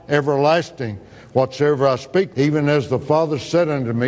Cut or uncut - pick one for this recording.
cut